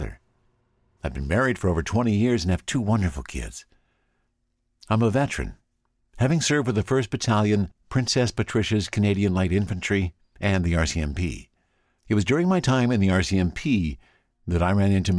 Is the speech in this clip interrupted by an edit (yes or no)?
yes